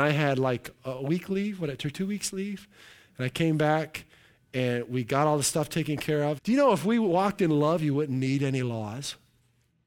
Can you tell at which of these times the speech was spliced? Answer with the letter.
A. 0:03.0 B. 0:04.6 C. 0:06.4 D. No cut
C